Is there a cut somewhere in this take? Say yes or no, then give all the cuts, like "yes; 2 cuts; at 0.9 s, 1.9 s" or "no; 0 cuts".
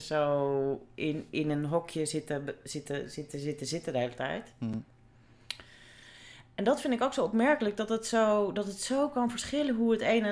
no; 0 cuts